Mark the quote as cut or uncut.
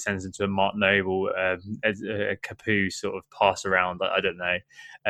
uncut